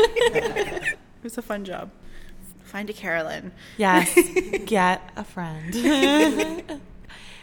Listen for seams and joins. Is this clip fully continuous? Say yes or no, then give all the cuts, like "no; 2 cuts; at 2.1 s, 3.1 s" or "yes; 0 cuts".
no; 2 cuts; at 0.9 s, 2.5 s